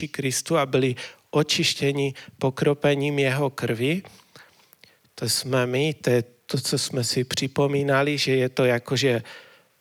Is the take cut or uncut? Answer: uncut